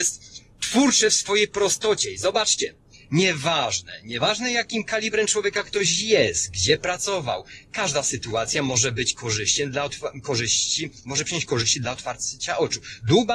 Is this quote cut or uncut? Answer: uncut